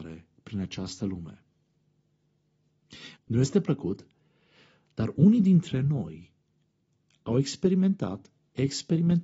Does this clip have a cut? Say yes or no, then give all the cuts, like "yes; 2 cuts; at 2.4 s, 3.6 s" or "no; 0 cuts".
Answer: yes; 1 cut; at 3.2 s